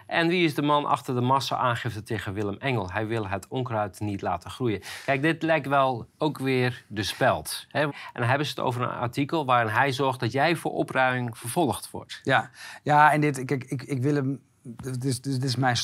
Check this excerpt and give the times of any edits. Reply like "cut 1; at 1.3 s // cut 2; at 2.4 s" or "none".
cut 1; at 7.9 s